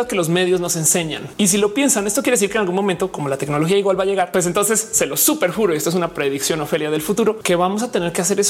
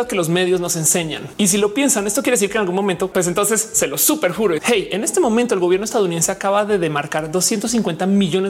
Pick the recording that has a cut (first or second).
second